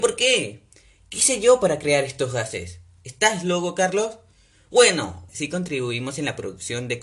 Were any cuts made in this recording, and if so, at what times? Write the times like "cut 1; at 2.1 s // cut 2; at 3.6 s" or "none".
cut 1; at 5.3 s

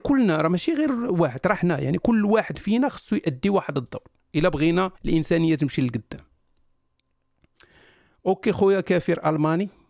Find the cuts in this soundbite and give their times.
cut 1; at 1.6 s // cut 2; at 5.0 s

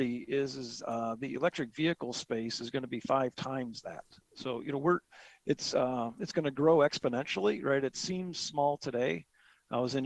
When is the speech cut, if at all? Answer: none

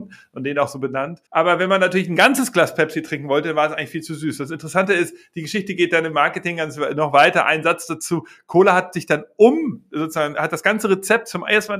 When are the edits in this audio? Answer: cut 1; at 1.3 s

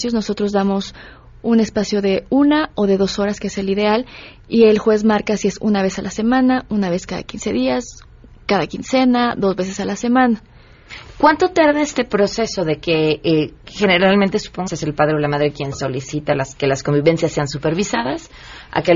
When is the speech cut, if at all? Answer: cut 1; at 14.7 s

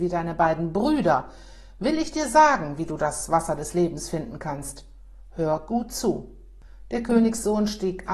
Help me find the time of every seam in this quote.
none

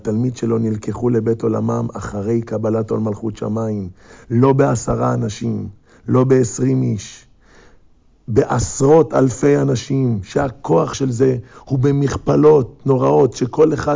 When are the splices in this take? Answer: none

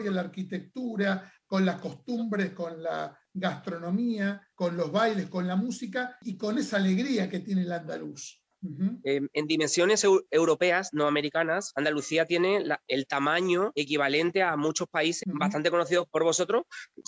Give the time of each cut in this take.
cut 1; at 8.6 s // cut 2; at 15.2 s

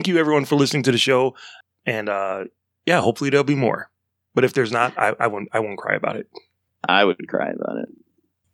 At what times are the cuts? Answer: none

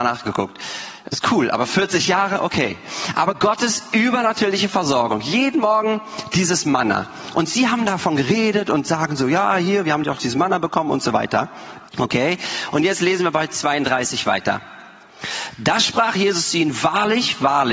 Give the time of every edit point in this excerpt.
cut 1; at 11.9 s

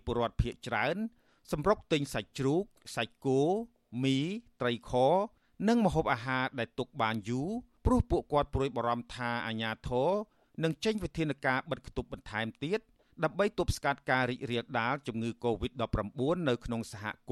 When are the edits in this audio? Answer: none

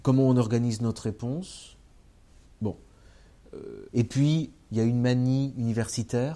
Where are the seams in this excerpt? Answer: cut 1; at 3.9 s

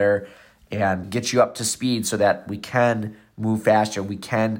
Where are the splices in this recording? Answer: cut 1; at 1.0 s

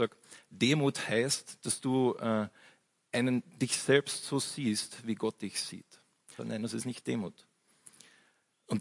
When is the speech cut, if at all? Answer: cut 1; at 6.4 s

